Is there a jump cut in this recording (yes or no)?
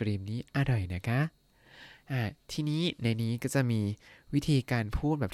no